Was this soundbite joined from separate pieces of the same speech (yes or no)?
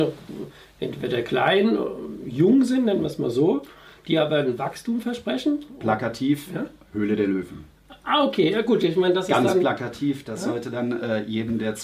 no